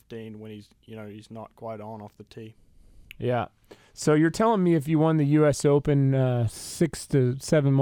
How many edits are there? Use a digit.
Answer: 0